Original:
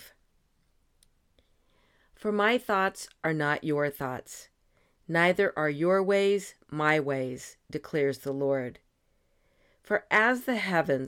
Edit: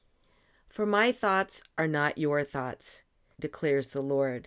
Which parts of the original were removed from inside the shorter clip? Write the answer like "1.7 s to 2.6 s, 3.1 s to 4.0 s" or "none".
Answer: 4.8 s to 7.6 s